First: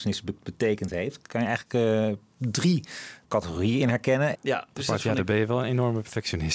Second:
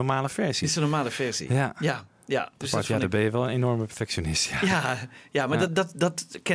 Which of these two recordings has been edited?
first; 2 cuts; at 3.2 s, 4.3 s

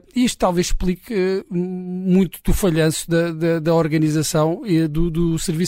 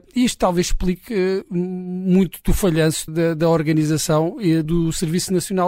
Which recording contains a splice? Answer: second; 2 cuts; at 3.1 s, 4.6 s

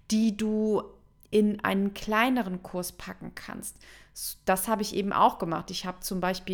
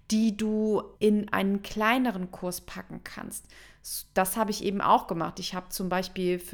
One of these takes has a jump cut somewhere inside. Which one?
second; 1 cut; at 0.9 s

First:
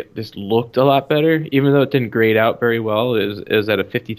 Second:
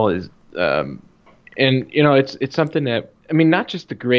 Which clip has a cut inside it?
second; 1 cut; at 3.2 s

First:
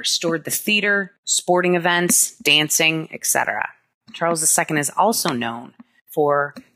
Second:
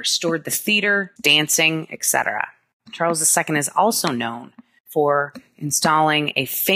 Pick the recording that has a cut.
second; 1 cut; at 1.2 s

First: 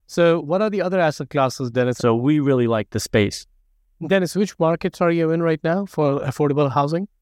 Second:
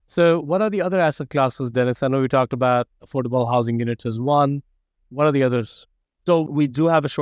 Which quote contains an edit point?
first; 1 cut; at 2.0 s

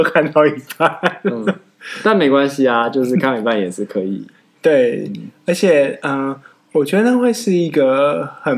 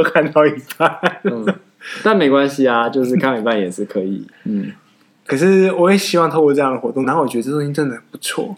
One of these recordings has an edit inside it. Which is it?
second; 2 cuts; at 4.3 s, 7.0 s

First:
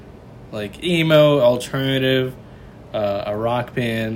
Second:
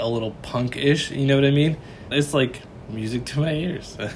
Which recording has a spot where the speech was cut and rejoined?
second; 1 cut; at 2.1 s

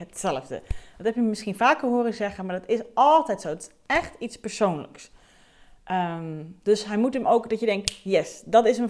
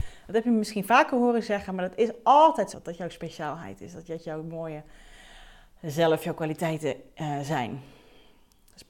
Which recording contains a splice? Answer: second; 1 cut; at 2.7 s

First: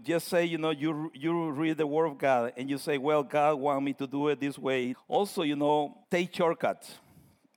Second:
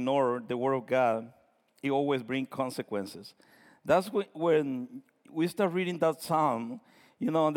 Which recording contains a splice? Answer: first; 2 cuts; at 4.9 s, 6.0 s

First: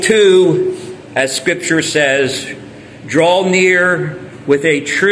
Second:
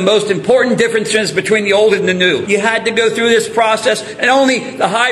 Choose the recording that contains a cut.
second; 1 cut; at 2.5 s

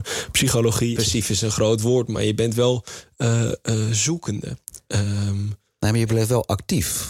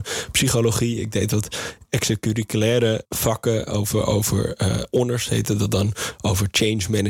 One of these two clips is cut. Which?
first; 1 cut; at 1.0 s

